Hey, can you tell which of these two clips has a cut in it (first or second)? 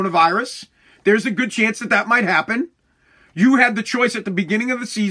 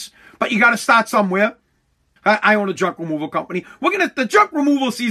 second